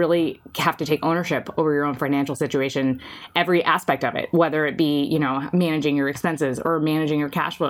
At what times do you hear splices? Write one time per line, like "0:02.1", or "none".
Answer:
none